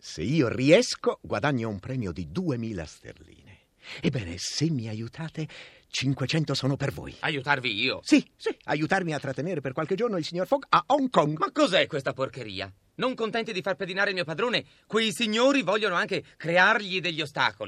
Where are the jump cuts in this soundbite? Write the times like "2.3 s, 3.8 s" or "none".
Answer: none